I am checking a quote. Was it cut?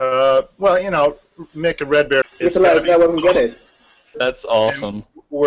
yes; 2 cuts; at 2.2 s, 4.1 s

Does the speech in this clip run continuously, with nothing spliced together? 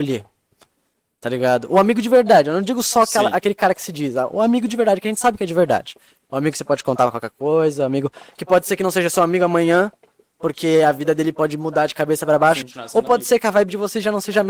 no; 1 cut; at 12.6 s

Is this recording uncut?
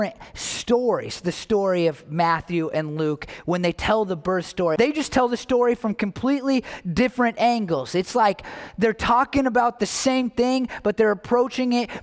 no; 1 cut; at 4.8 s

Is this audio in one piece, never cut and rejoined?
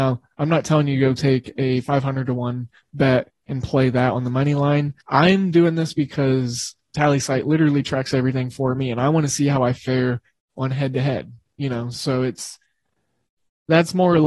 no; 1 cut; at 5.0 s

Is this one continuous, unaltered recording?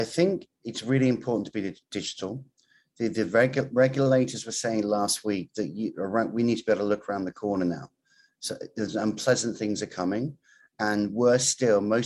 yes; 0 cuts

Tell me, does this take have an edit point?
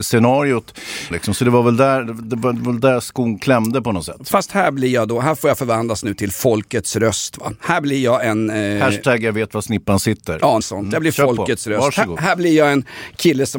yes; 2 cuts; at 1.1 s, 10.6 s

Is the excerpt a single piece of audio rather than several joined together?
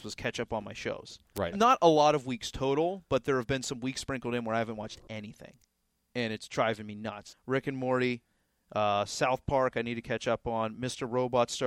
no; 2 cuts; at 1.5 s, 7.3 s

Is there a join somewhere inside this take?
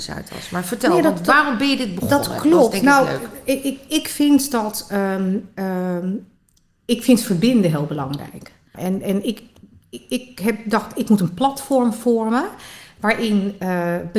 yes; 1 cut; at 8.7 s

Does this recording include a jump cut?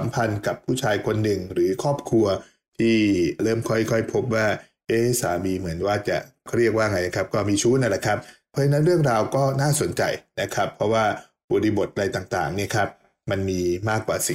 no; 0 cuts

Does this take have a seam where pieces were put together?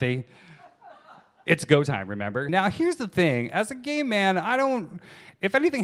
yes; 1 cut; at 2.5 s

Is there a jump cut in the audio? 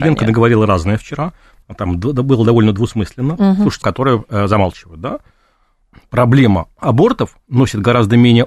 yes; 2 cuts; at 1.6 s, 3.8 s

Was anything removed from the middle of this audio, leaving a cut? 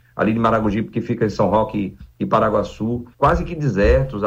yes; 1 cut; at 3.1 s

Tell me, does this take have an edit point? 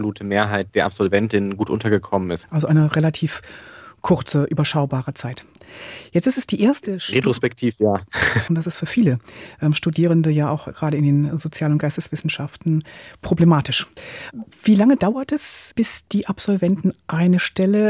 yes; 2 cuts; at 2.4 s, 8.5 s

